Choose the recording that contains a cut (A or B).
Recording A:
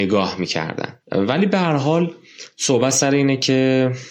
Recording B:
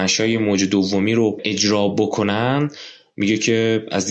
A